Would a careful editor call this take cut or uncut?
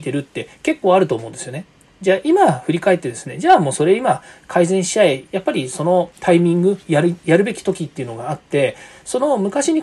cut